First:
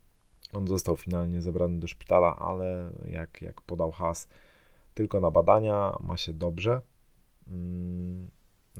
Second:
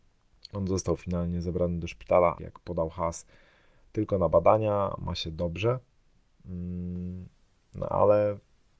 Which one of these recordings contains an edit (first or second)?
second